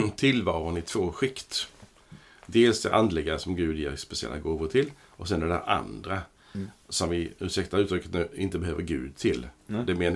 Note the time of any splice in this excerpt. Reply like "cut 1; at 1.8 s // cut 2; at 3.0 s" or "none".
none